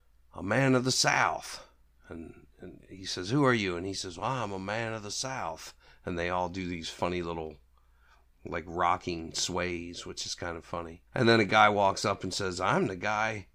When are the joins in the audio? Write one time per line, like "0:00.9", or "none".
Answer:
0:11.1